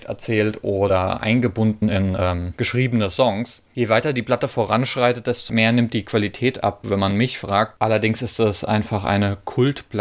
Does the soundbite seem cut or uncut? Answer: uncut